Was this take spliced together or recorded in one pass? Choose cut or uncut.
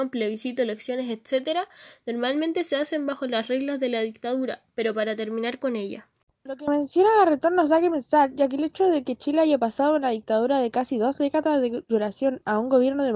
uncut